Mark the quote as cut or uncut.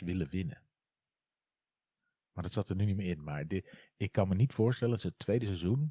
uncut